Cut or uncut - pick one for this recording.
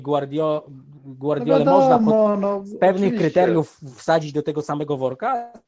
uncut